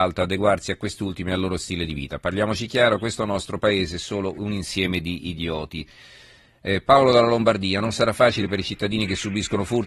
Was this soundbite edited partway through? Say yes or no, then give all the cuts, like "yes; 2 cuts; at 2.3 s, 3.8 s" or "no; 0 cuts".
no; 0 cuts